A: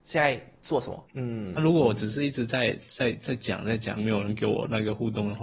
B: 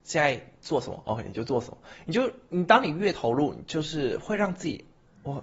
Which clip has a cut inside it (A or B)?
A